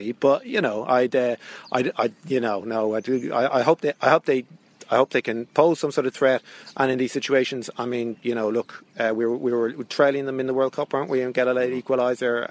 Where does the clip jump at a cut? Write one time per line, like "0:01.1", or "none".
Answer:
none